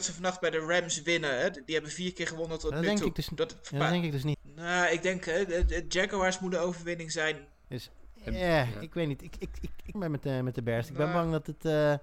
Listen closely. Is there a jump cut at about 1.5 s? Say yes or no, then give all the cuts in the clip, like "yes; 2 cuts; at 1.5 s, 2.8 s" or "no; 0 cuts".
no; 3 cuts; at 4.3 s, 7.6 s, 9.9 s